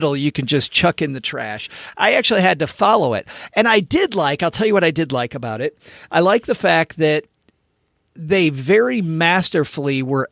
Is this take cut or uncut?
uncut